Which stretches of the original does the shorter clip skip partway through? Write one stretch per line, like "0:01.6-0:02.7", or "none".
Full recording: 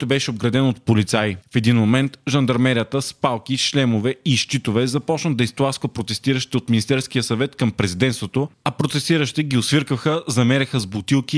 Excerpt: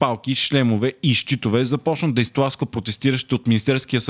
none